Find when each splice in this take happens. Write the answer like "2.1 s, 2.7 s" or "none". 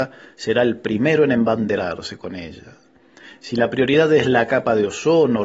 none